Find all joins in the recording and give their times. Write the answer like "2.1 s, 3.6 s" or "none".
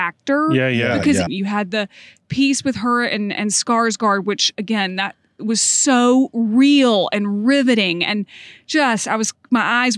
1.3 s

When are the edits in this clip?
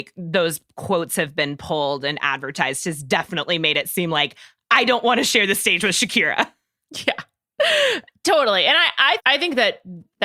9.2 s

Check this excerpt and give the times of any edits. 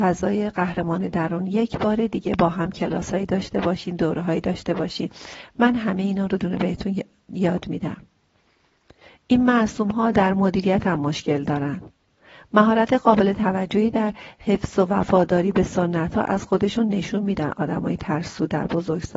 6.4 s

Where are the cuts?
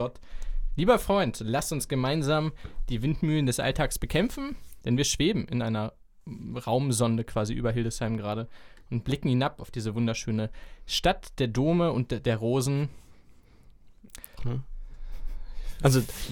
4.8 s, 14.4 s

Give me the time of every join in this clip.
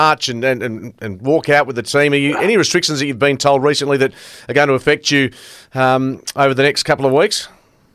none

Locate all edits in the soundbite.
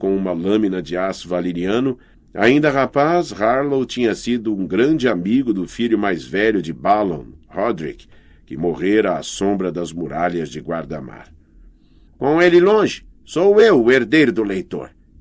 2.1 s, 12.1 s

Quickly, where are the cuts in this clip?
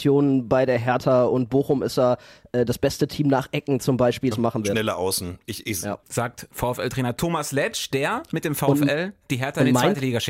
4.3 s, 6.0 s

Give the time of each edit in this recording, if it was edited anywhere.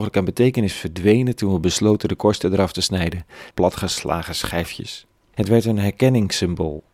3.5 s, 5.3 s

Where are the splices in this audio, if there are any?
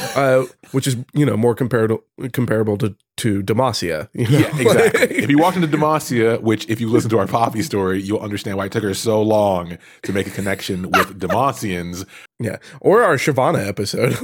12.3 s

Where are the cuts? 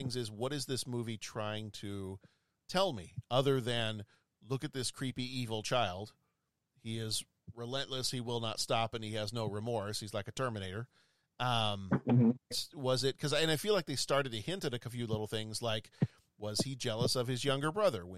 12.5 s

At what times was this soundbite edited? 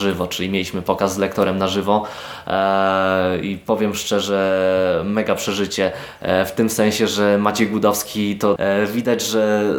8.6 s

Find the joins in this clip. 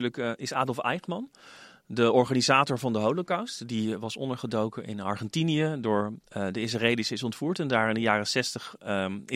none

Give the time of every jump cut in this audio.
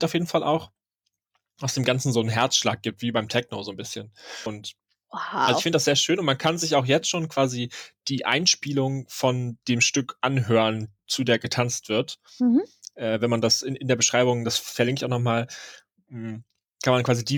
4.5 s

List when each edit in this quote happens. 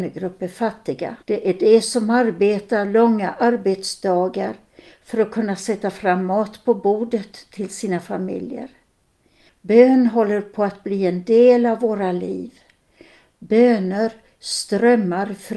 1.2 s, 9.5 s

